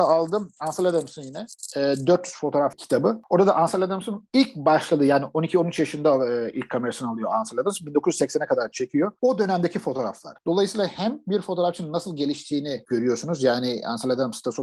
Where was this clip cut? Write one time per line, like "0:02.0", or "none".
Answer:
none

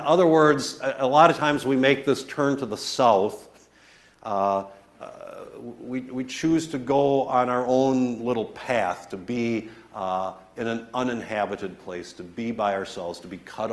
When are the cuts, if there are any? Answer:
none

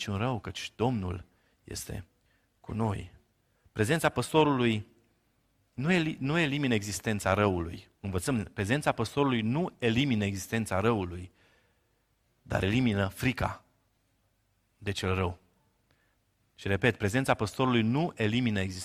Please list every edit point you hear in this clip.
0:08.0

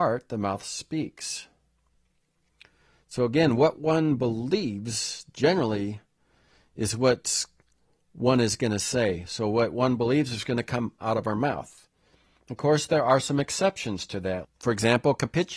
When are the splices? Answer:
0:14.4

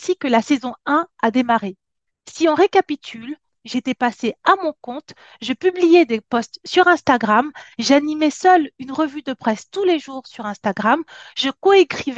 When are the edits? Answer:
0:03.5

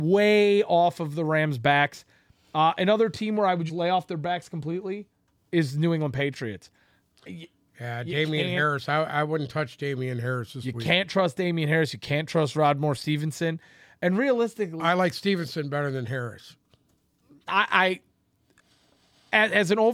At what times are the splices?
0:03.7

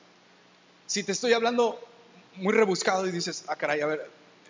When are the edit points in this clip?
none

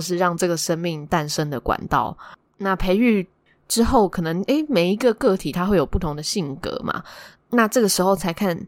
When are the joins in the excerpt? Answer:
0:02.5
0:07.4

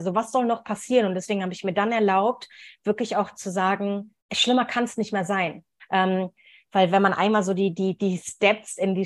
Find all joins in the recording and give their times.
0:04.2
0:05.8

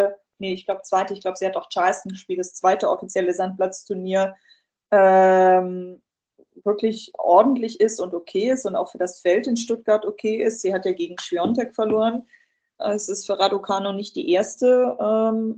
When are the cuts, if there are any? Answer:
0:12.8

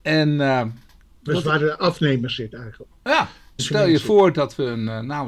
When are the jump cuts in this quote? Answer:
0:03.6

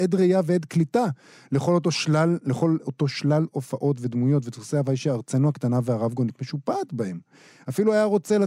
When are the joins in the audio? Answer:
none

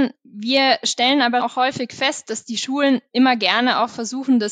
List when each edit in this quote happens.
0:01.4

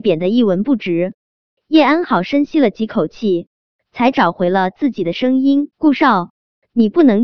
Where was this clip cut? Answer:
0:01.6
0:05.7

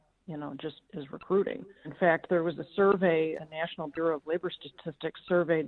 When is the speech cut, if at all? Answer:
0:01.8
0:03.4

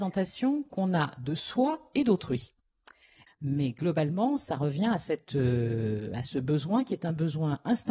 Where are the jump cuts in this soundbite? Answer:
0:03.3

